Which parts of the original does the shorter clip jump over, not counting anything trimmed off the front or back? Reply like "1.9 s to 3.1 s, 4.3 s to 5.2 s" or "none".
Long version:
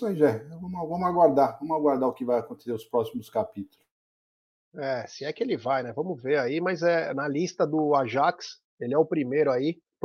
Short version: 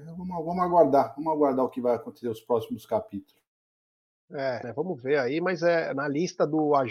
5.1 s to 5.8 s